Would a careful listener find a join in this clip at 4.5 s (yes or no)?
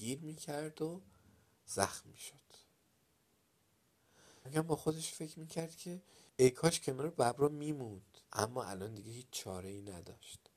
yes